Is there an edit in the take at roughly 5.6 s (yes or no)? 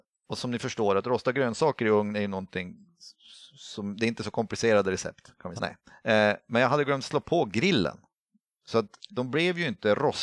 yes